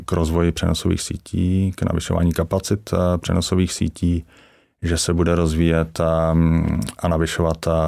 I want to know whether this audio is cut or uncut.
uncut